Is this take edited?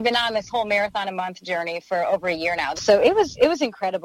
yes; 1 cut; at 2.8 s

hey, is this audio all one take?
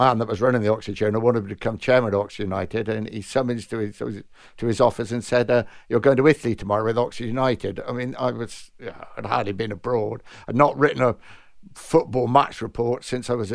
yes; 0 cuts

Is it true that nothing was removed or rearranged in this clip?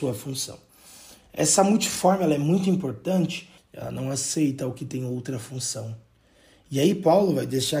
no; 1 cut; at 3.6 s

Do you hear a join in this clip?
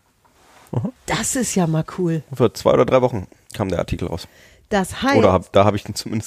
yes; 1 cut; at 1.0 s

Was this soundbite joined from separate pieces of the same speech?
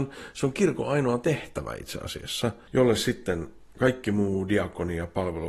yes; 1 cut; at 2.7 s

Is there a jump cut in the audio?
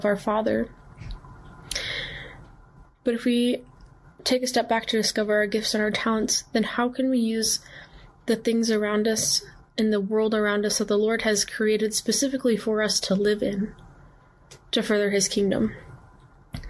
yes; 1 cut; at 2.9 s

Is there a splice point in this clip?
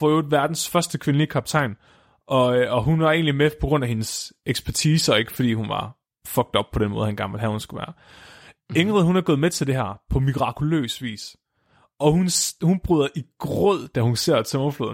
no; 0 cuts

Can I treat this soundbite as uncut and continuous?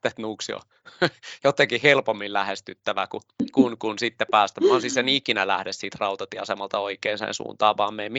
yes; 0 cuts

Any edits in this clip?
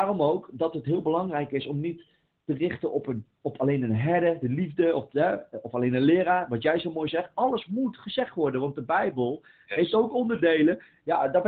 no; 0 cuts

